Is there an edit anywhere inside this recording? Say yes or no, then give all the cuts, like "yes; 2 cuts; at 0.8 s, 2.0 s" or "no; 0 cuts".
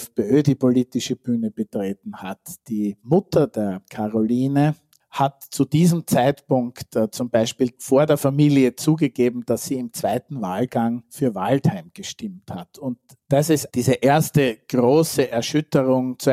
yes; 2 cuts; at 5.0 s, 13.7 s